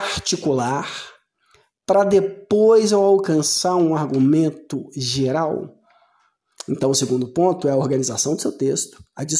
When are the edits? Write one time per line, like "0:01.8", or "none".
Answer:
none

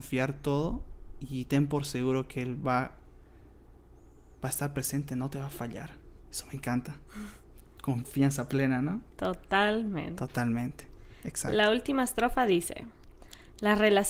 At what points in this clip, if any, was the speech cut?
0:06.2

